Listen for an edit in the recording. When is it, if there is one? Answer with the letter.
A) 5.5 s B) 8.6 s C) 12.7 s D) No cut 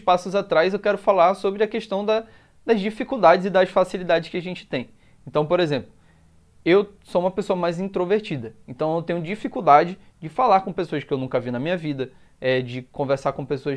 D